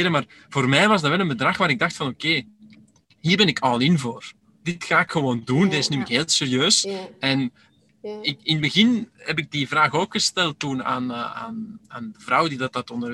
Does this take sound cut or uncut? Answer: uncut